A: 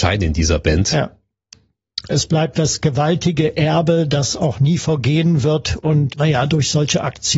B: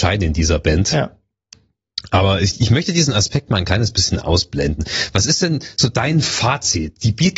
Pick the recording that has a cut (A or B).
A